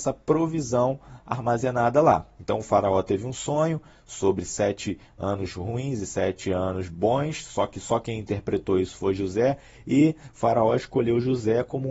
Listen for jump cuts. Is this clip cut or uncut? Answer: uncut